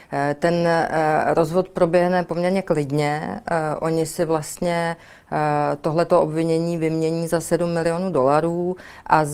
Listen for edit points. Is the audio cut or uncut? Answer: uncut